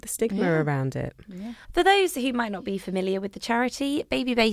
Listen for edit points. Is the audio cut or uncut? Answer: cut